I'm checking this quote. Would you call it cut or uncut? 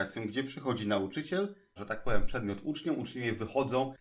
cut